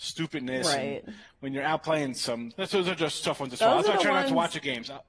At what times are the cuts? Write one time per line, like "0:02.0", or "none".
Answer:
0:02.5